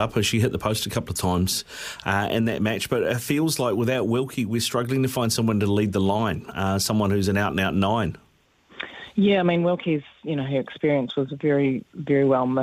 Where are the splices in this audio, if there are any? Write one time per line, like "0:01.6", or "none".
none